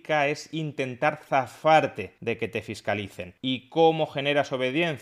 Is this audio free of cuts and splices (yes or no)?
no